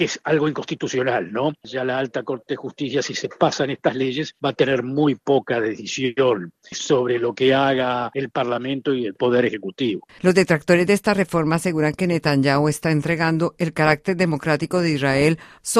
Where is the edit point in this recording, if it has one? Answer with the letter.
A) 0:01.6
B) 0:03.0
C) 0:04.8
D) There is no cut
D